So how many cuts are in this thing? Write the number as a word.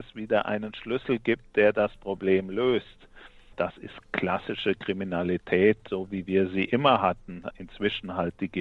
zero